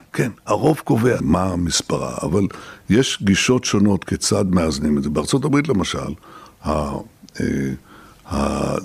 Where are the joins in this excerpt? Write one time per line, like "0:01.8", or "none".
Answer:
0:01.2